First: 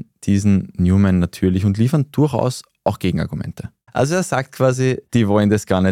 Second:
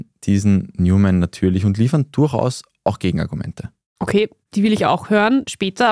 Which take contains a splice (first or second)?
first